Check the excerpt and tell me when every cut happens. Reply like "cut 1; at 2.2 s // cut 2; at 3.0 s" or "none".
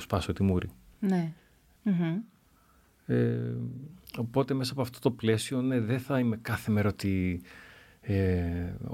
cut 1; at 1.8 s